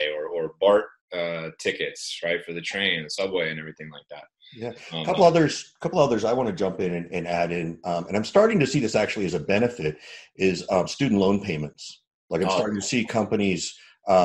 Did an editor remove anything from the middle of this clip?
no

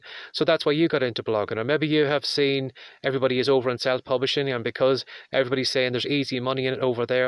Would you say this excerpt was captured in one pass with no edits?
yes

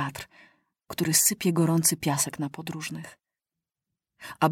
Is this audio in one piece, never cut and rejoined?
yes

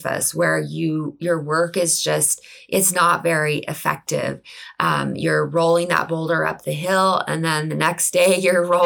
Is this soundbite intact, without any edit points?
yes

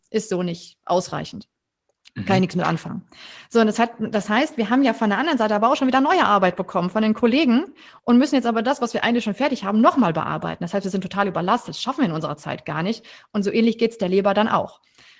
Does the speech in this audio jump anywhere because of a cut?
no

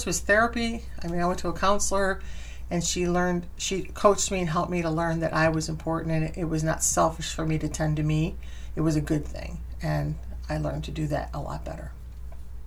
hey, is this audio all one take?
yes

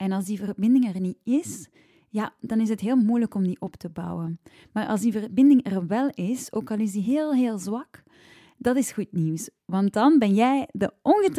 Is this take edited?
no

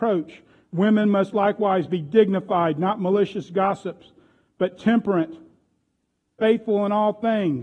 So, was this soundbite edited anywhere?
no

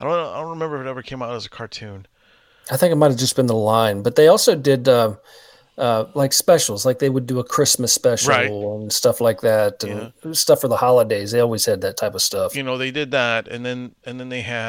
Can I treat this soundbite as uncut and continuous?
yes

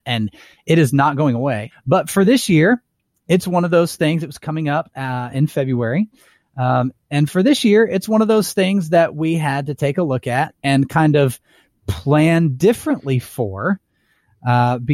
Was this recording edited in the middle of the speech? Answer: yes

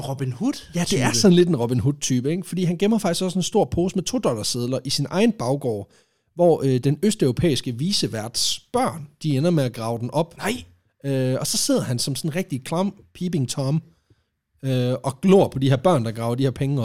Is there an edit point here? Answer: no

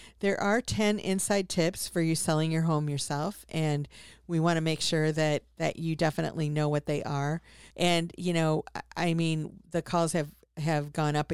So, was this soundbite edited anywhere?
yes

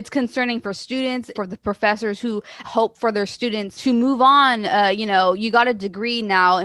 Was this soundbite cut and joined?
yes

